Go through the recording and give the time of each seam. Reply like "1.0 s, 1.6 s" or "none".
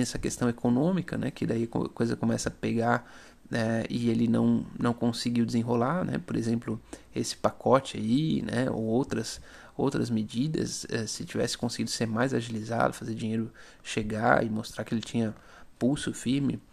none